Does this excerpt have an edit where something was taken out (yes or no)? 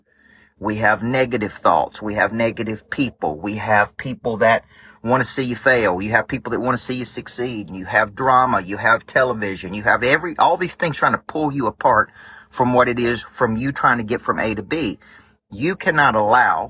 yes